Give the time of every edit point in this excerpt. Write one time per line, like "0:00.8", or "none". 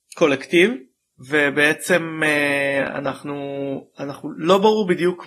none